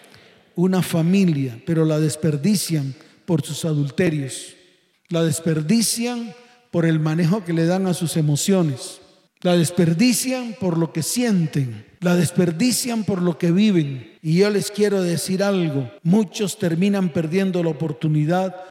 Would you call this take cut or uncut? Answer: uncut